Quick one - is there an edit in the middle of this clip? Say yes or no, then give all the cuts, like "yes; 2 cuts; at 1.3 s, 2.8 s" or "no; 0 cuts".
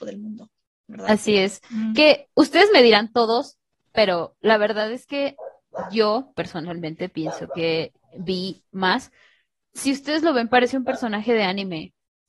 no; 0 cuts